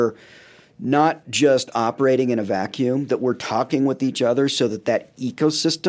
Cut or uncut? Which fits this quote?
uncut